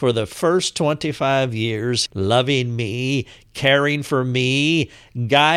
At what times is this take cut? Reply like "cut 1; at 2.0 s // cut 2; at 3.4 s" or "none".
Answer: cut 1; at 2.1 s